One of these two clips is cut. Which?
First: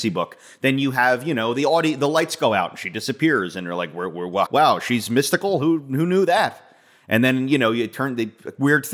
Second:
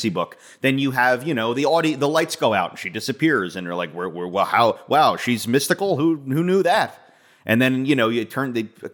first; 1 cut; at 4.5 s

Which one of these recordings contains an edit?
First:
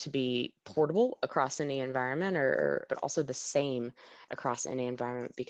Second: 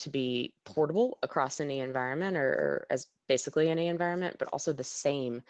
first; 1 cut; at 2.9 s

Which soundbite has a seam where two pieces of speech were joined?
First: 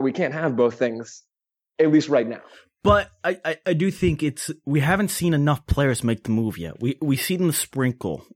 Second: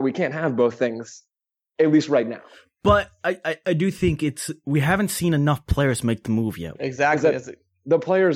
second; 1 cut; at 6.8 s

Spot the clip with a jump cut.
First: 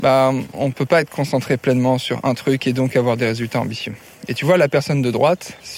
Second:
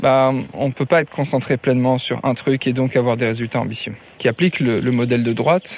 second; 1 cut; at 4.2 s

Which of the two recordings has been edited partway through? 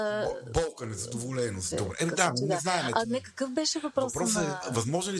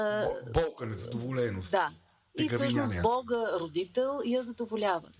first; 1 cut; at 1.7 s

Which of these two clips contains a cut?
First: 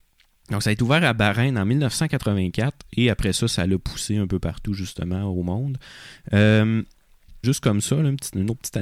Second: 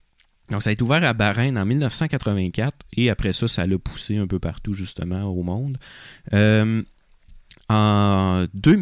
first; 1 cut; at 7.4 s

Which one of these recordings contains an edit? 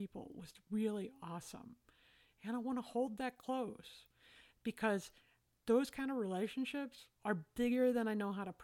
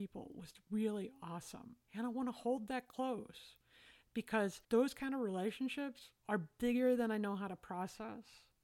second; 2 cuts; at 1.8 s, 4.6 s

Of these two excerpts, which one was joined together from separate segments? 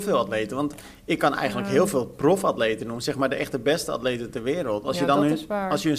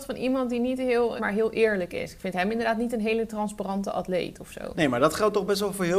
second; 1 cut; at 1.2 s

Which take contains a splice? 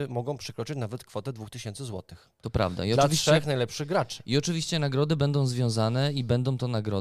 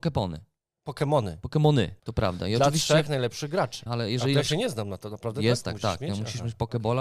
second; 2 cuts; at 2.0 s, 3.9 s

